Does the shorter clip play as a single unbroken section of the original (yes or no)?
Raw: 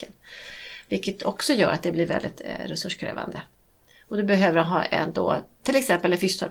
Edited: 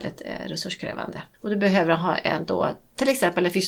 no